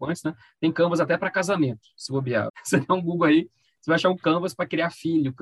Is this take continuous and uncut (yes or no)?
no